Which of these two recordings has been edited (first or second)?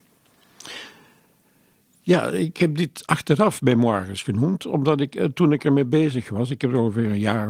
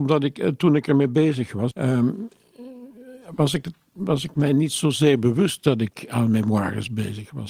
second